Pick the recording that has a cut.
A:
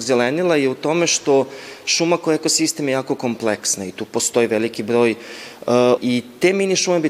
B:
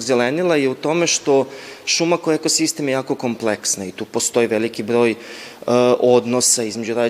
A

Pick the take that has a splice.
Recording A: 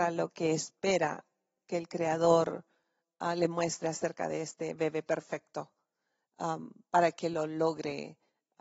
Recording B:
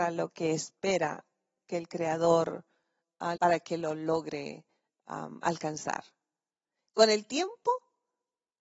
B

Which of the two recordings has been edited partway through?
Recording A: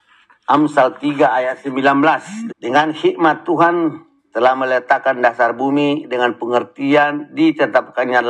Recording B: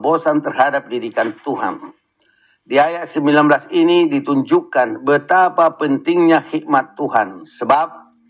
A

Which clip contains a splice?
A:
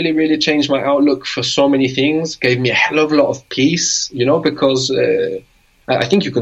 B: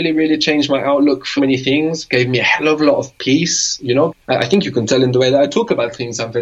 B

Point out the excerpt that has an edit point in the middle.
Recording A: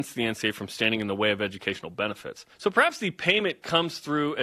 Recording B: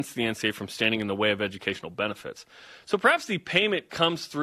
A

